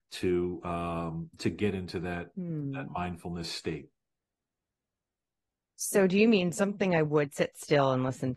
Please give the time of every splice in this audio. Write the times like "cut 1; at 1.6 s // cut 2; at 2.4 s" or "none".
none